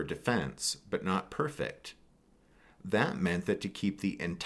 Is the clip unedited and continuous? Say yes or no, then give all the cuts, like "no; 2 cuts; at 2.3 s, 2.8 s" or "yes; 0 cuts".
yes; 0 cuts